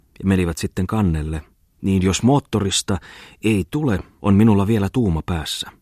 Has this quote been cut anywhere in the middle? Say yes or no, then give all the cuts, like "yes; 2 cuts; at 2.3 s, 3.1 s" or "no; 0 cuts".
yes; 2 cuts; at 1.7 s, 4.2 s